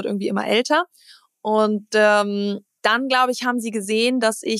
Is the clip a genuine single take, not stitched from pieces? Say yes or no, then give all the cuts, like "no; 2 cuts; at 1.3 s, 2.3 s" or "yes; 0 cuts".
yes; 0 cuts